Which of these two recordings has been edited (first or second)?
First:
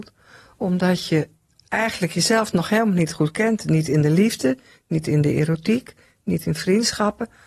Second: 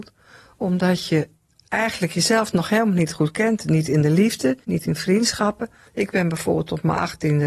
second